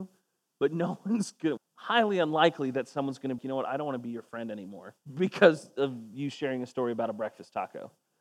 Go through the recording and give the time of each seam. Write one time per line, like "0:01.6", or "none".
0:01.6
0:03.4
0:05.0